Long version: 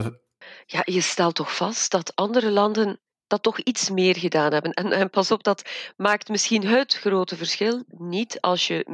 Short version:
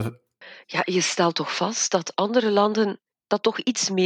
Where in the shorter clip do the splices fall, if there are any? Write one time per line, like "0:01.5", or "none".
none